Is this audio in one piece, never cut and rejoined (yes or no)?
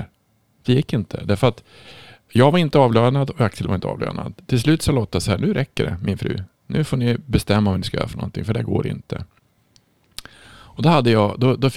yes